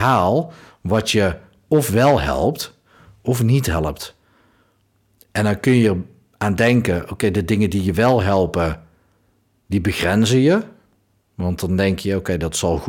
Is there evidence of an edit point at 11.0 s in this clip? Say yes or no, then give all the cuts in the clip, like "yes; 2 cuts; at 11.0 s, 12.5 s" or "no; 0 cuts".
no; 0 cuts